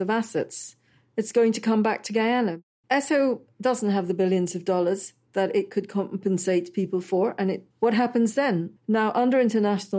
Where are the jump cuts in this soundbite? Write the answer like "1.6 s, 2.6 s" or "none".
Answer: 2.8 s, 7.7 s, 8.8 s